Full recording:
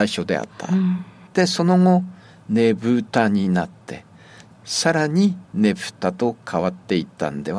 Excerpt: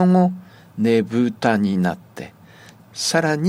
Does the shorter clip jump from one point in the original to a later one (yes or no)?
no